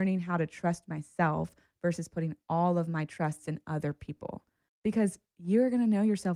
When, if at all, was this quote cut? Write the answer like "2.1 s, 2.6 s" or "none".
none